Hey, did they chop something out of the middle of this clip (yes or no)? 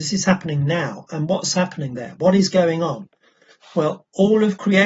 no